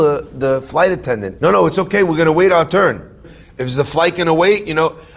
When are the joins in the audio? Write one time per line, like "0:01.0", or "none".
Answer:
0:01.4
0:03.2